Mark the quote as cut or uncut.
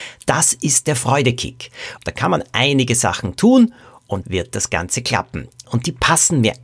cut